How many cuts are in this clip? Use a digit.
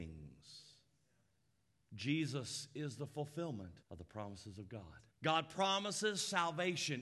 2